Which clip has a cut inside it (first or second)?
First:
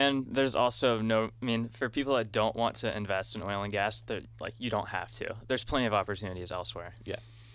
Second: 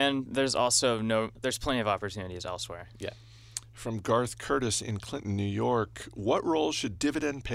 second